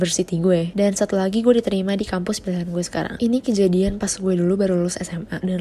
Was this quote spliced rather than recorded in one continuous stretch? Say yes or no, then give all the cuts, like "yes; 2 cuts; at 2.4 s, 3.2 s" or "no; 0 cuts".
yes; 1 cut; at 3.2 s